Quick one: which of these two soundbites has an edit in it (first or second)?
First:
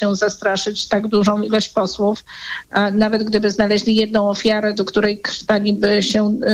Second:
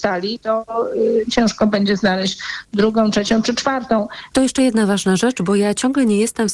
second